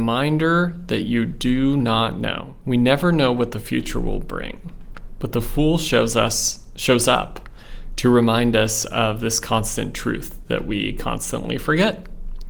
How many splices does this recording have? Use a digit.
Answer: 1